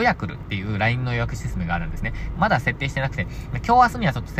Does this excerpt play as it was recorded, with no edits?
no; 1 cut; at 2.3 s

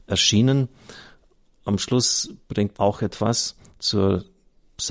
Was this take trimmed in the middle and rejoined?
yes; 1 cut; at 2.7 s

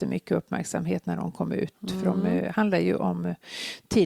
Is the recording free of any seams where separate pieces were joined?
yes; 0 cuts

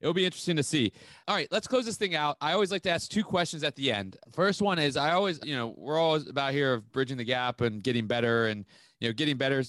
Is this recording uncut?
yes; 0 cuts

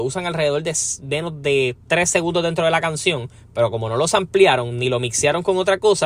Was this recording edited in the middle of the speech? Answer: no; 0 cuts

